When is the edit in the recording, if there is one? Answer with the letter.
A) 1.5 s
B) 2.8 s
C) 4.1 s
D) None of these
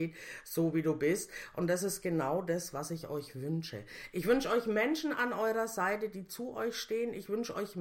D